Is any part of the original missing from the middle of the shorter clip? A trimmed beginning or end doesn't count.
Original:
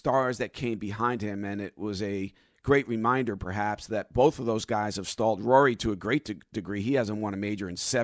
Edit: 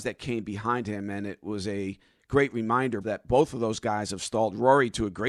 yes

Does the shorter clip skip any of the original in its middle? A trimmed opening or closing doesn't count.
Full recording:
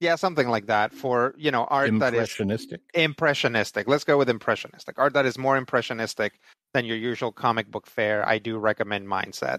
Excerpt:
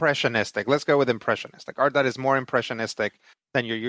no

